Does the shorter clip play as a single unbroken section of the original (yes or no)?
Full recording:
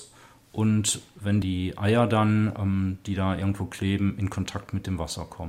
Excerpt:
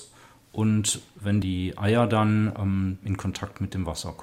no